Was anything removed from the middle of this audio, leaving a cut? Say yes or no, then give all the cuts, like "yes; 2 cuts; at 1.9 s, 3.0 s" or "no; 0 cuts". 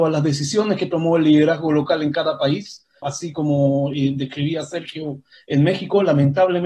yes; 1 cut; at 3.0 s